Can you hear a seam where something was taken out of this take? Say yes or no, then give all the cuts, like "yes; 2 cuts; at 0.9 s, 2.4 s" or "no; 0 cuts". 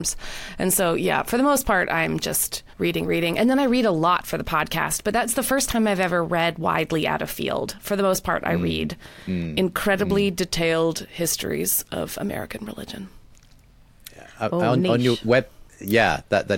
yes; 1 cut; at 2.7 s